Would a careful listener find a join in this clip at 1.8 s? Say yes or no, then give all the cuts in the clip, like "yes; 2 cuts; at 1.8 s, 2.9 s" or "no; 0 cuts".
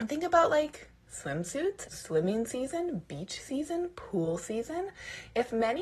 yes; 1 cut; at 1.8 s